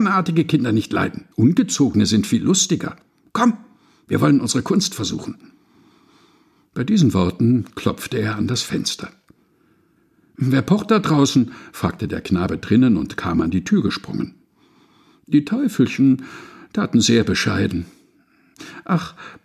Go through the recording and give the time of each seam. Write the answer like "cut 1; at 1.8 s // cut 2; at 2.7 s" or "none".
cut 1; at 1.3 s